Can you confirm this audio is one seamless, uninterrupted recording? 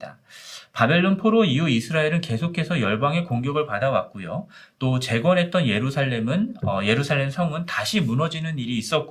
yes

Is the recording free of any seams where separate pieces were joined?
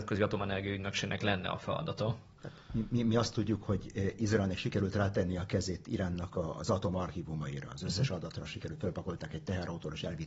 yes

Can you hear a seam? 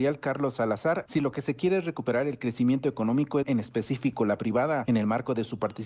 yes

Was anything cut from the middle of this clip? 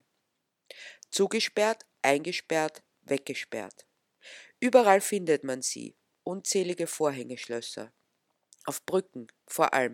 no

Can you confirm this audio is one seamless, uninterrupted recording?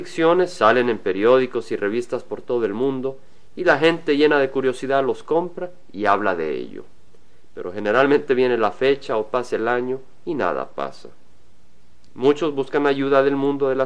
yes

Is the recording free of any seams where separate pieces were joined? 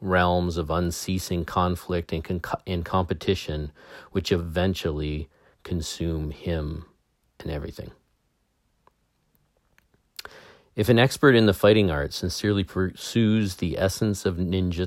yes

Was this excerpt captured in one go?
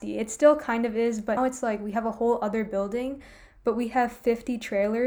no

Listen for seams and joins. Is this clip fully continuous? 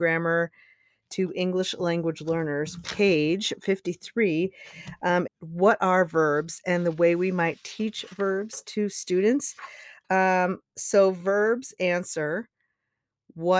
no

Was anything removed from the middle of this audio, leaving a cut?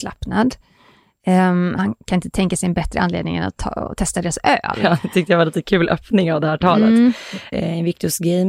yes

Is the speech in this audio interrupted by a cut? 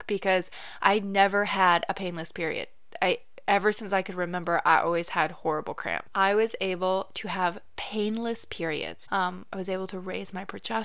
yes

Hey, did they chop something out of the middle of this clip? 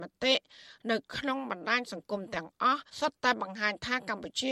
yes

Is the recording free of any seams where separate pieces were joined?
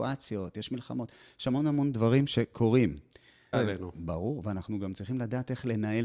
no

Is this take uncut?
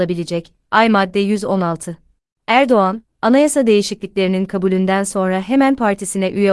no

